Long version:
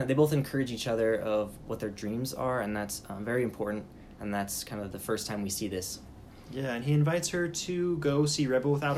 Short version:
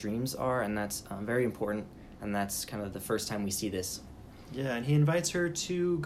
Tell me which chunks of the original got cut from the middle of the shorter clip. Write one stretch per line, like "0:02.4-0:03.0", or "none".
none